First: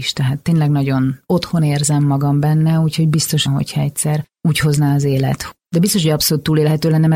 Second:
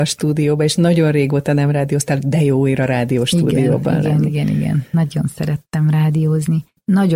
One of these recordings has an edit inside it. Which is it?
first; 2 cuts; at 3.5 s, 5.7 s

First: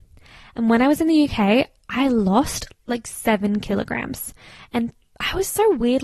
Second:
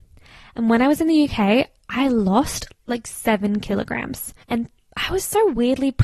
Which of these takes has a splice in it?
second; 1 cut; at 4.4 s

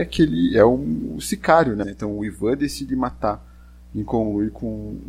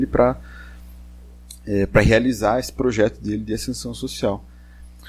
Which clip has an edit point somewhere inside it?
first; 1 cut; at 1.8 s

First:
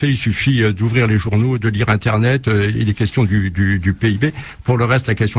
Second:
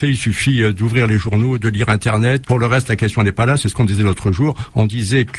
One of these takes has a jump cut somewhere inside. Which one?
second; 1 cut; at 2.4 s

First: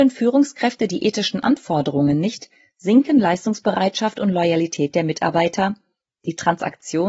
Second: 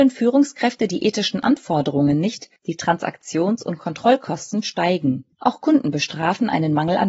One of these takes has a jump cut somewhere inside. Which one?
second; 2 cuts; at 2.6 s, 5.3 s

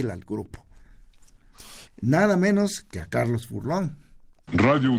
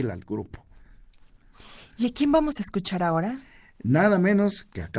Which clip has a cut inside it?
first; 1 cut; at 1.9 s

